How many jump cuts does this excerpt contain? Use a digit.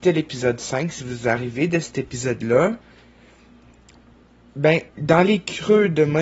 1